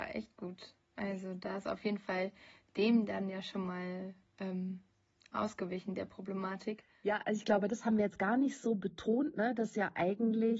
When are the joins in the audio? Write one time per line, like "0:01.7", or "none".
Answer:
none